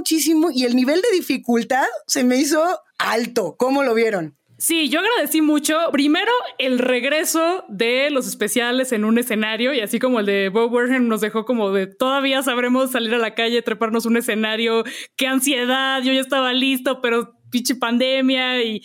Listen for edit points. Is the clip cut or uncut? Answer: cut